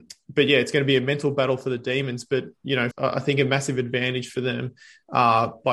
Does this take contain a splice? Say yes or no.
yes